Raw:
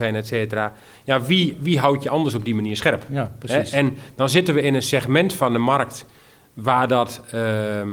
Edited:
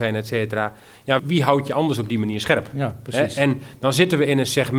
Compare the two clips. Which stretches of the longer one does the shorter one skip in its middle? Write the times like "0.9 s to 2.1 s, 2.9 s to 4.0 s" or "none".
1.2 s to 1.6 s